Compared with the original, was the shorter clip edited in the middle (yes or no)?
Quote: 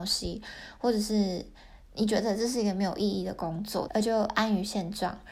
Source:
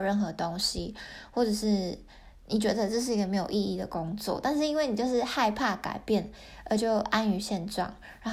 yes